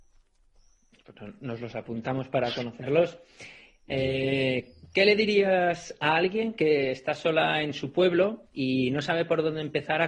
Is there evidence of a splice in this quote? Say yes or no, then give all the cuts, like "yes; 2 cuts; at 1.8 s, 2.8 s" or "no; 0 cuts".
no; 0 cuts